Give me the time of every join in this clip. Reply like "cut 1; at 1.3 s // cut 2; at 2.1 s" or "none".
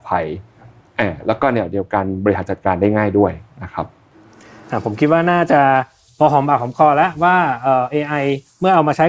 none

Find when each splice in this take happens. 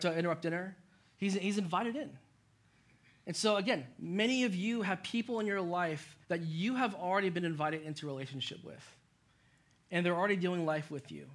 cut 1; at 6.2 s

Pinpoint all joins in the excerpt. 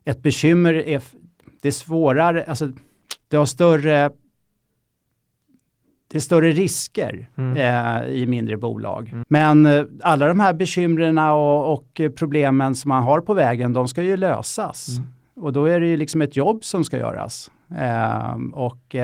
cut 1; at 3.2 s // cut 2; at 9.2 s

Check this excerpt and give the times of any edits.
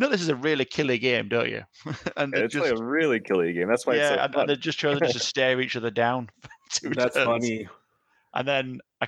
none

